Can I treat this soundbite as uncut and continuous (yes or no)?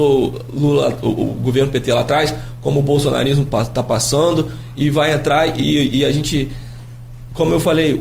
yes